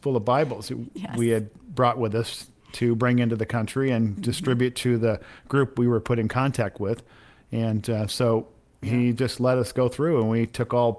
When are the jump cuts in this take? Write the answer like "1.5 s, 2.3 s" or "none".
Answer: none